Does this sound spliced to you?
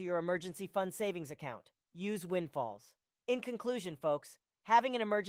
yes; 2 cuts; at 1.8 s, 3.2 s

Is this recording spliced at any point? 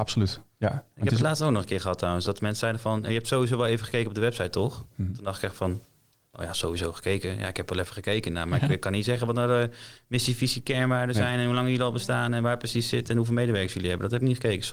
no; 0 cuts

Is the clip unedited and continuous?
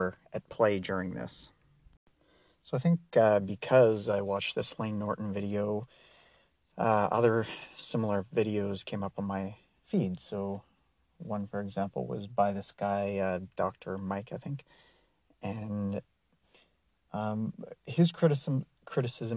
yes; 0 cuts

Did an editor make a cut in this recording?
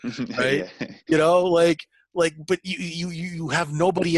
no; 0 cuts

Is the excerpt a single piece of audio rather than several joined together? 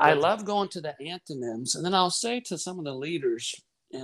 yes; 0 cuts

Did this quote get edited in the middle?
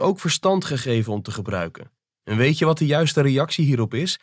yes; 1 cut; at 2.2 s

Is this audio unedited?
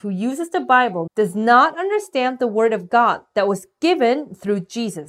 no; 1 cut; at 1.1 s

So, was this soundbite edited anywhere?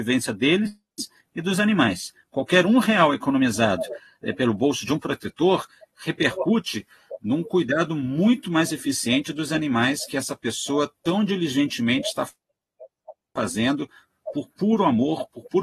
no; 0 cuts

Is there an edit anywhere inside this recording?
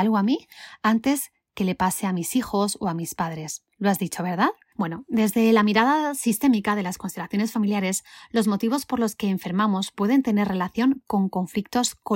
yes; 1 cut; at 4.7 s

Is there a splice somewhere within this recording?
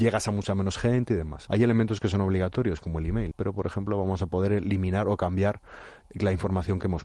yes; 2 cuts; at 1.5 s, 3.3 s

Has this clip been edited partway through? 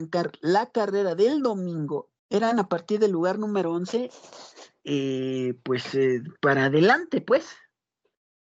yes; 1 cut; at 2.2 s

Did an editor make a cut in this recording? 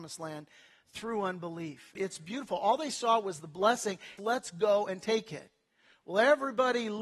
yes; 2 cuts; at 2.0 s, 4.2 s

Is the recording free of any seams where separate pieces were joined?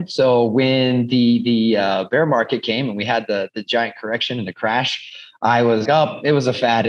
no; 1 cut; at 5.9 s

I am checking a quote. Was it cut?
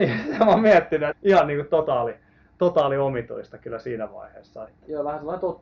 yes; 2 cuts; at 1.1 s, 4.7 s

